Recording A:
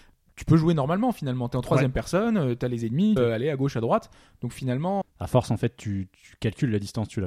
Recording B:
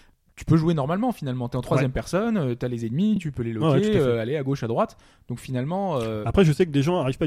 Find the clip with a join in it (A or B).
A